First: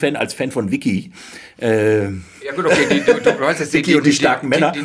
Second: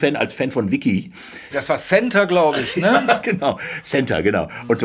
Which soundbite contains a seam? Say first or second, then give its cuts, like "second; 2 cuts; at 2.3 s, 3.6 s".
second; 1 cut; at 1.5 s